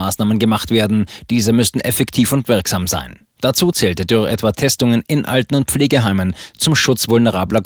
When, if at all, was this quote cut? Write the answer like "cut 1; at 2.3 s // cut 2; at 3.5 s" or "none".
none